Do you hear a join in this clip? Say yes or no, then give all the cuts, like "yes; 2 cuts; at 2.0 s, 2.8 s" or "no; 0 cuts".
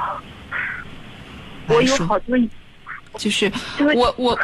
yes; 2 cuts; at 1.7 s, 3.1 s